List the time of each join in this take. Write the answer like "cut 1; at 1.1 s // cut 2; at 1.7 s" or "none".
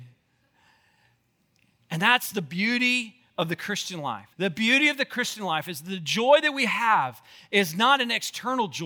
cut 1; at 4.3 s